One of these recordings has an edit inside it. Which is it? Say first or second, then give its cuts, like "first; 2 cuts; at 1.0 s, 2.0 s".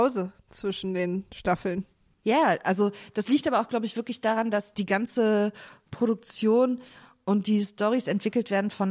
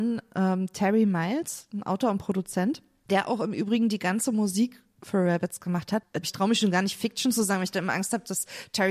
second; 1 cut; at 6.2 s